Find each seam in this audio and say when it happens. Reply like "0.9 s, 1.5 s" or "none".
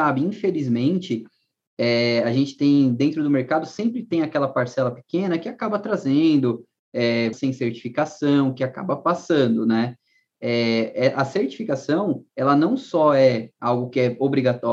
7.3 s, 10.3 s